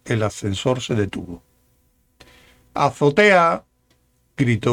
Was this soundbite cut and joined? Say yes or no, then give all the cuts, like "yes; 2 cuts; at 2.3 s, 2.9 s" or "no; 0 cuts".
no; 0 cuts